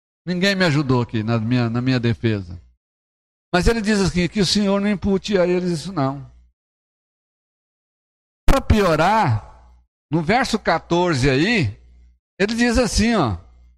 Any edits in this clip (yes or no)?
no